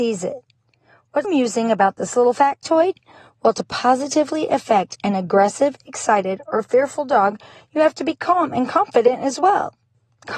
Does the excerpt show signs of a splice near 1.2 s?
yes; 1 cut; at 1.2 s

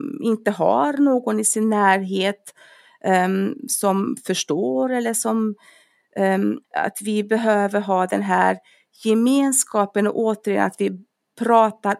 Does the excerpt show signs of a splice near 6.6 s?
yes; 1 cut; at 6.6 s

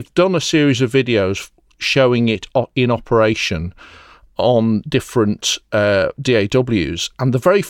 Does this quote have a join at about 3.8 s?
no; 0 cuts

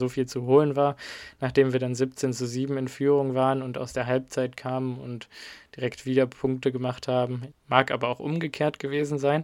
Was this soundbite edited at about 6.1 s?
no; 1 cut; at 7.5 s

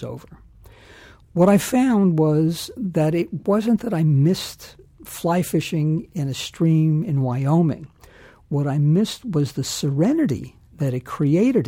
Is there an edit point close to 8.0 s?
no; 0 cuts

